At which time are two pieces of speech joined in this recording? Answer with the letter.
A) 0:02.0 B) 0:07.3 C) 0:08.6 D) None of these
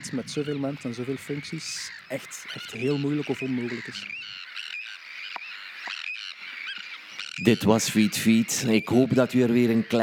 D